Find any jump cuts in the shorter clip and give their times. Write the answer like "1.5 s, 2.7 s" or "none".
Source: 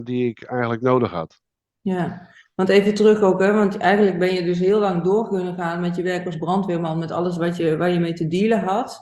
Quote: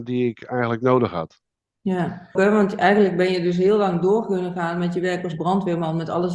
2.4 s